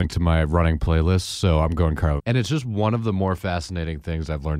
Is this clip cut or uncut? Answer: cut